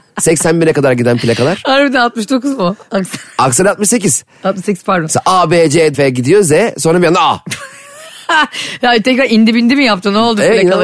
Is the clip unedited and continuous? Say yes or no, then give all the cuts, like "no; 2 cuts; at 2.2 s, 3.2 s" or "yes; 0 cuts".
no; 1 cut; at 5.9 s